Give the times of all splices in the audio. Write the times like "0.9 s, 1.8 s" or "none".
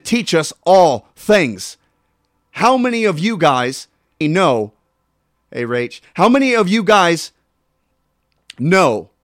4.2 s